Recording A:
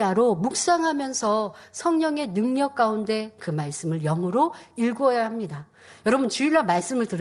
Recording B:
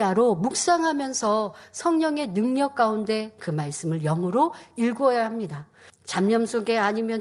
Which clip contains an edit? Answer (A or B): B